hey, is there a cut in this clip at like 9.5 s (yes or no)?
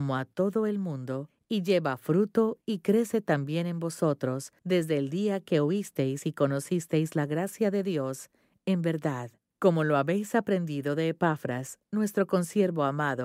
no